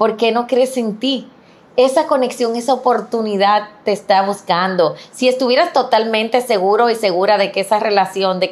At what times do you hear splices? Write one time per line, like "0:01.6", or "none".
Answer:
none